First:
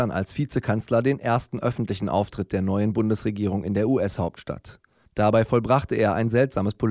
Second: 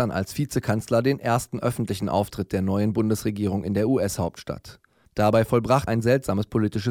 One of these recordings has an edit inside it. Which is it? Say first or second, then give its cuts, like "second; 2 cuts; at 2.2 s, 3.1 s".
second; 1 cut; at 5.9 s